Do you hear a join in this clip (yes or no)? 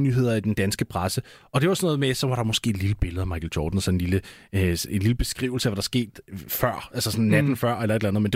no